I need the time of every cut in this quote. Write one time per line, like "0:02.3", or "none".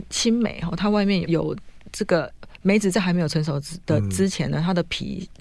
0:01.2